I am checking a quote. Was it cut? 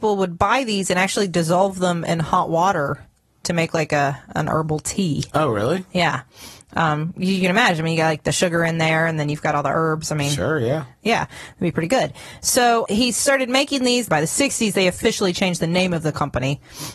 yes; 2 cuts; at 12.9 s, 14.1 s

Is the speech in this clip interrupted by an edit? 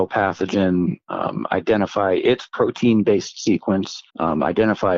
yes; 1 cut; at 4.1 s

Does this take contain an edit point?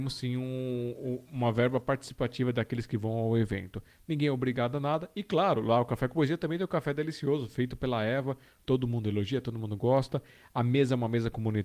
no; 0 cuts

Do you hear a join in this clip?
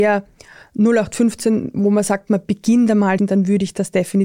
yes; 1 cut; at 3.2 s

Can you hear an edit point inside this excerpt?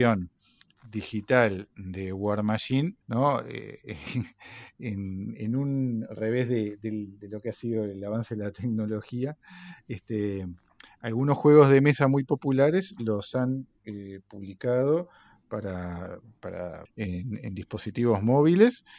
yes; 2 cuts; at 3.0 s, 16.9 s

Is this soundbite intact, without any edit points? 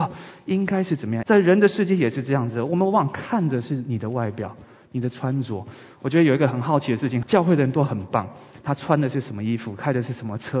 no; 3 cuts; at 1.2 s, 7.2 s, 8.6 s

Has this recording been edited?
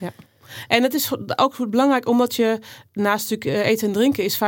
no; 0 cuts

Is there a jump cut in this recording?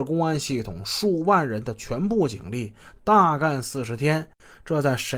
no; 0 cuts

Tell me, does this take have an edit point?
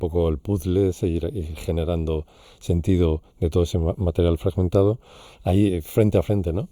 yes; 1 cut; at 5.3 s

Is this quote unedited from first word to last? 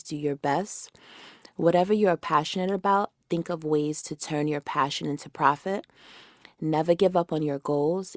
yes; 0 cuts

